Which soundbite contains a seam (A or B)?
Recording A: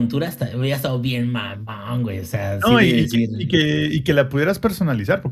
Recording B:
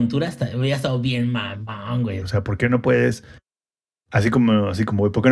B